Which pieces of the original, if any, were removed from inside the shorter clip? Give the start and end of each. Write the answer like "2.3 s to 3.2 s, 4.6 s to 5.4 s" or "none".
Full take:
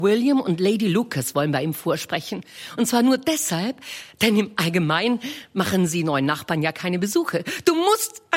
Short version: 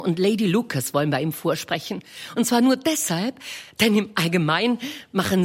none

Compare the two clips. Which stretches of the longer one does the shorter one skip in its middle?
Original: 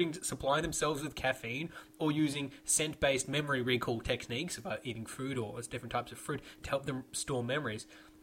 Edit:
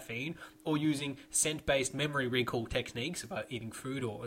none

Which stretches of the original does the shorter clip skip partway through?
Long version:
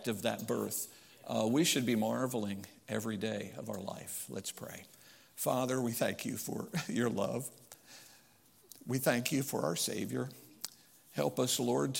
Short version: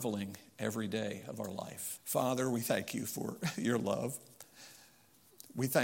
4.3 s to 5.3 s

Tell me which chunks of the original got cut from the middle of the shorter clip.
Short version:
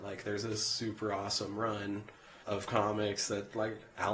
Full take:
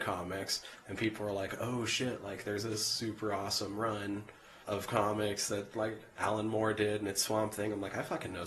none

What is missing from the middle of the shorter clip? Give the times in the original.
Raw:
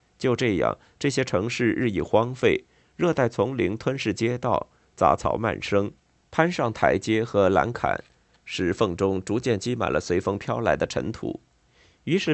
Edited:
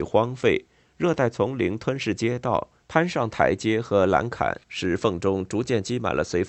4.8 s to 6.2 s, 8.1 s to 8.4 s

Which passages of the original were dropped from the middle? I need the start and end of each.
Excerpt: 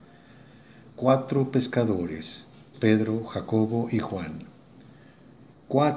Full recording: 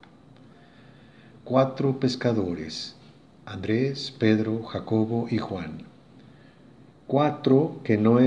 3.2 s to 4.1 s

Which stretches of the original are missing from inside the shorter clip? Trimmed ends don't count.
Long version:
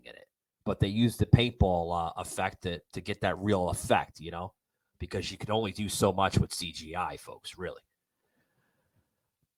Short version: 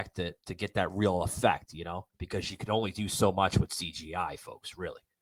4.6 s to 4.9 s

